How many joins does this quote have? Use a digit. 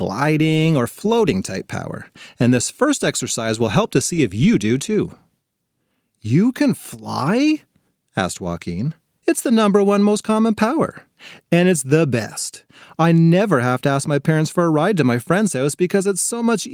1